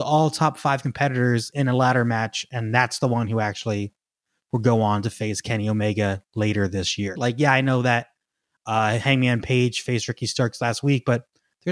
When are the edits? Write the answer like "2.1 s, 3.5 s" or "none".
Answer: 7.2 s